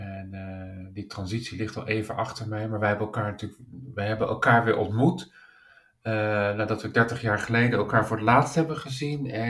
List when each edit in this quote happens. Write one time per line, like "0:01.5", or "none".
none